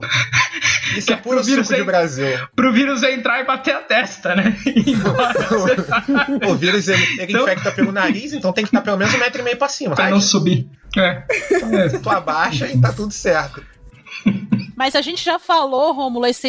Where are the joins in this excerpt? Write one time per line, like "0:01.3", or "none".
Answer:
0:10.0

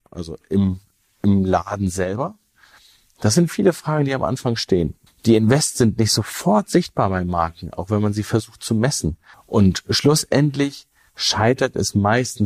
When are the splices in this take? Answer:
0:05.1
0:09.3

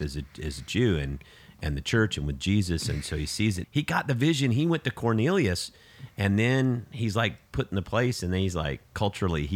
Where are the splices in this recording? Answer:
0:03.6

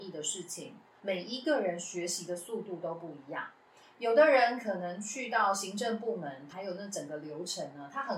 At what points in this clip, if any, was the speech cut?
0:01.0
0:06.5

